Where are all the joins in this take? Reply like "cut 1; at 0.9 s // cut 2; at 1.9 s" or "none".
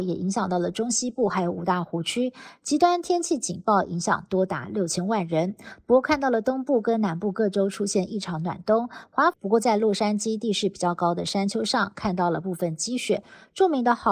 cut 1; at 9.3 s